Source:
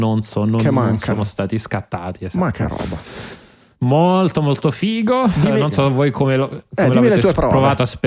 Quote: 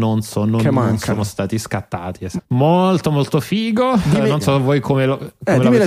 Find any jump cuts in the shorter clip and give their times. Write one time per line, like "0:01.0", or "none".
0:02.4